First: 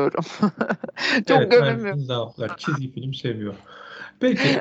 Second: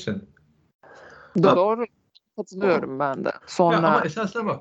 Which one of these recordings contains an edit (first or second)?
second